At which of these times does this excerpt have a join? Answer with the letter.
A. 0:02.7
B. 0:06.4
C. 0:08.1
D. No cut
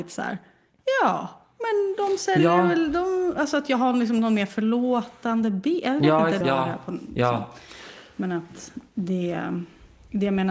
B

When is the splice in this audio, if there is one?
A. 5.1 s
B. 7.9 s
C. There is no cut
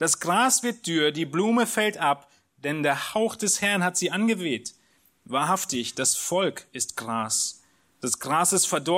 C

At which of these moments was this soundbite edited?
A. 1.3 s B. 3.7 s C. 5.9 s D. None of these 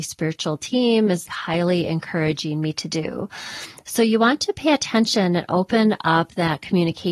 A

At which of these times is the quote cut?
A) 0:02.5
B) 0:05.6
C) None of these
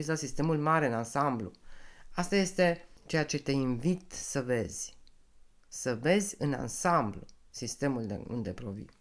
C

